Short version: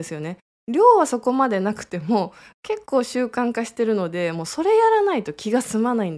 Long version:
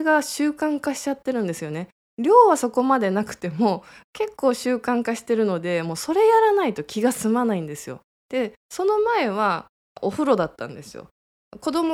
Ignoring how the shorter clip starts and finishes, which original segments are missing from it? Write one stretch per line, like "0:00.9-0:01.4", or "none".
none